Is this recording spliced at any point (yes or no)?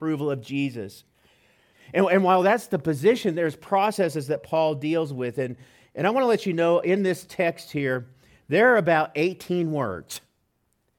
yes